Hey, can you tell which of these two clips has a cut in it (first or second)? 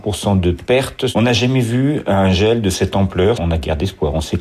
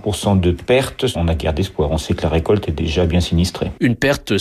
second